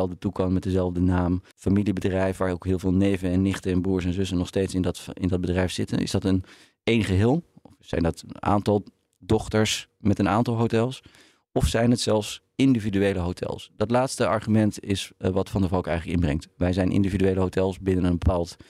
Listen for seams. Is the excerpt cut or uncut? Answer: cut